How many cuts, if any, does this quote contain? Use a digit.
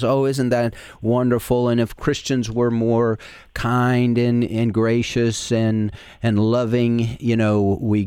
0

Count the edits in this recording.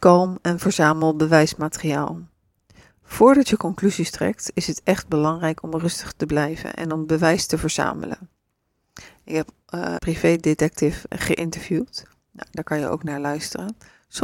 2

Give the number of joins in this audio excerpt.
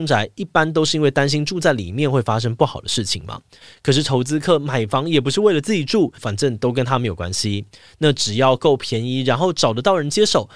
1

